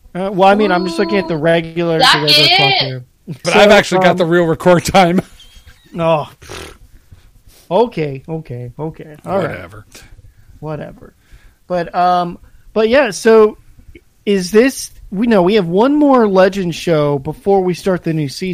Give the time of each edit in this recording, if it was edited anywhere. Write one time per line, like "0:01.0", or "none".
0:03.4